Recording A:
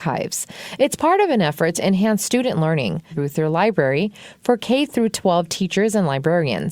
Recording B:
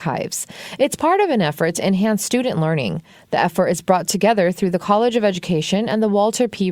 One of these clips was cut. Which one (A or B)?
A